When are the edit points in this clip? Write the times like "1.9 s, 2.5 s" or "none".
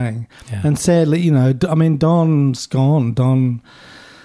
none

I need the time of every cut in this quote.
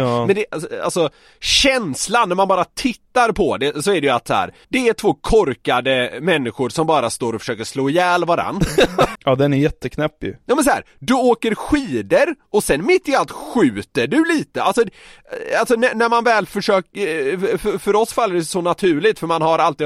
4.6 s, 9.2 s

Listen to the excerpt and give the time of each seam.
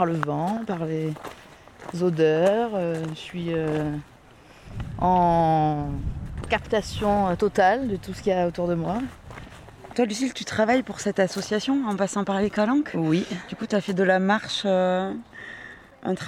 9.9 s

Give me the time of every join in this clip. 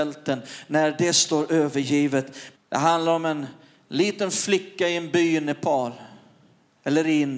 2.5 s

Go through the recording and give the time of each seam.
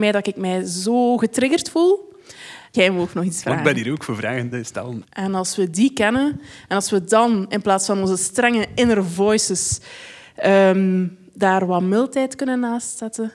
2.7 s, 5.0 s

